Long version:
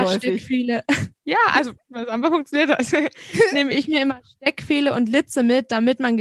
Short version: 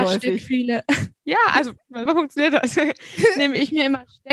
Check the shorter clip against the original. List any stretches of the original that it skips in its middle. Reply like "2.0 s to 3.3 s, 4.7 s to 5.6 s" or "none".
2.1 s to 2.2 s